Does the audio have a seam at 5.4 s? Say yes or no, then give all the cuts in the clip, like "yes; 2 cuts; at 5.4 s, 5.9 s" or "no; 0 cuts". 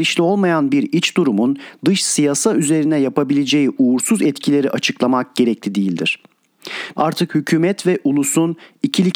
no; 1 cut; at 7.0 s